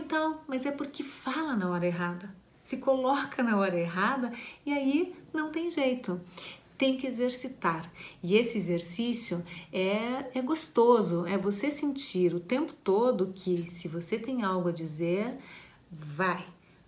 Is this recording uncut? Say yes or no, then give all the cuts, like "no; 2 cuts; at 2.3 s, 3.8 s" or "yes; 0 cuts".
yes; 0 cuts